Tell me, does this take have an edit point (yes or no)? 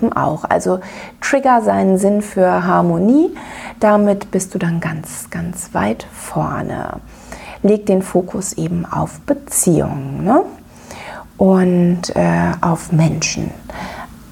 no